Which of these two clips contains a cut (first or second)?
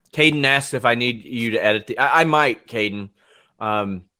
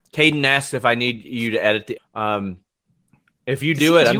second